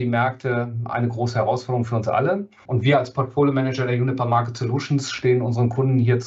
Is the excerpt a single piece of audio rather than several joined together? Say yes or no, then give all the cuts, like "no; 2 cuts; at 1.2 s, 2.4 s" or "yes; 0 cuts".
no; 1 cut; at 2.7 s